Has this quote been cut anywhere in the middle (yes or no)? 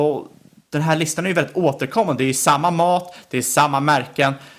no